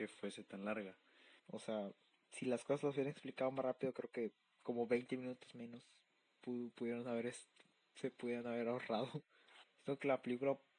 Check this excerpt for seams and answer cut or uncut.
cut